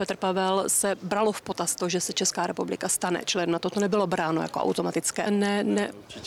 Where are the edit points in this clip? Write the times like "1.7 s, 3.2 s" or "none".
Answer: 5.3 s